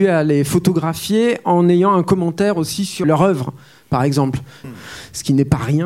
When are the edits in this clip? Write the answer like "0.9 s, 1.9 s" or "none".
3.0 s, 4.6 s